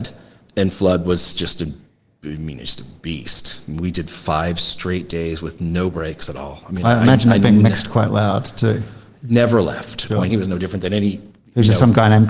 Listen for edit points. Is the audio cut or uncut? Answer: cut